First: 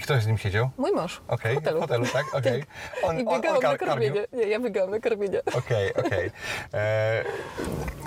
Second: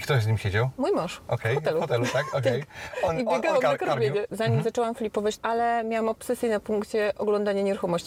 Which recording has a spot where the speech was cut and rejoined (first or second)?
second